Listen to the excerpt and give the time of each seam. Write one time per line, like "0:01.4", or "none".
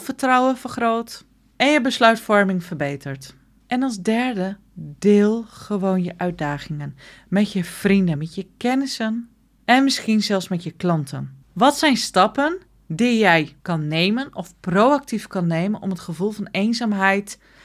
0:08.1
0:11.4
0:13.6